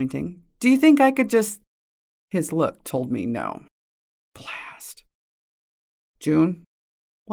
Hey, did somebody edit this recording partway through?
no; 0 cuts

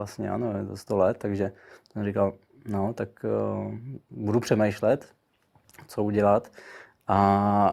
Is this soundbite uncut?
yes; 0 cuts

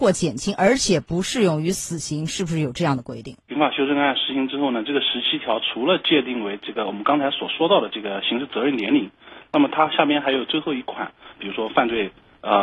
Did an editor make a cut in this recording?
yes; 2 cuts; at 3.5 s, 11.3 s

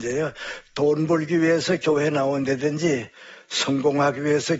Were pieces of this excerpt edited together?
no; 0 cuts

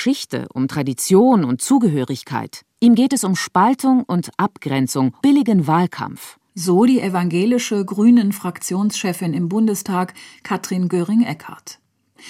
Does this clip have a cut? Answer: yes; 1 cut; at 5.2 s

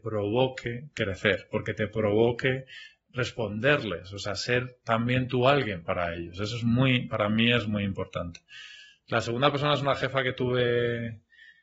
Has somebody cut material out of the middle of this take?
no; 0 cuts

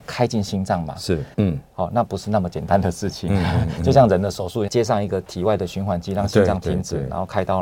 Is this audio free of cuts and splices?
no; 2 cuts; at 1.3 s, 4.7 s

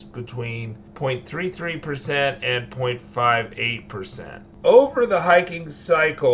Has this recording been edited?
no; 0 cuts

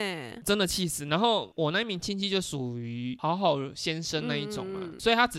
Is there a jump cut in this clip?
no; 0 cuts

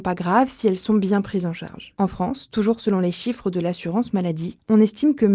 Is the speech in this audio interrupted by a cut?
yes; 1 cut; at 2.0 s

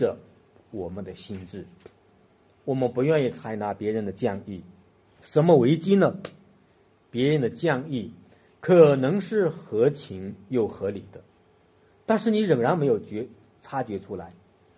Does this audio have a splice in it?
yes; 1 cut; at 5.1 s

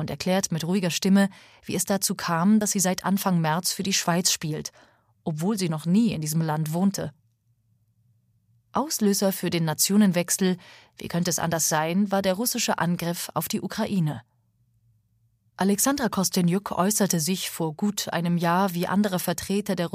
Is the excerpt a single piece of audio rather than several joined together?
yes; 0 cuts

